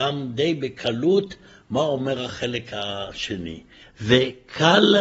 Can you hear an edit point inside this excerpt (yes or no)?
yes